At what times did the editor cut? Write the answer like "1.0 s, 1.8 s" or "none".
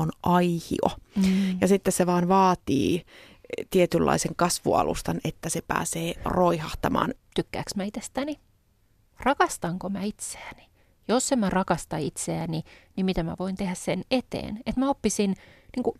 7.2 s